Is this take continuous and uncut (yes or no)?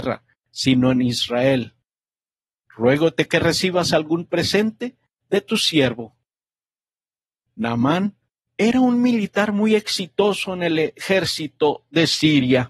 yes